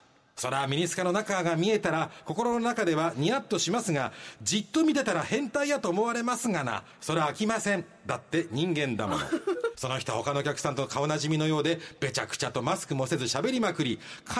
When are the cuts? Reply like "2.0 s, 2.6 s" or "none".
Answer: 9.7 s